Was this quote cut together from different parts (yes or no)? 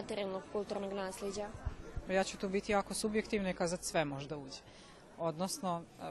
no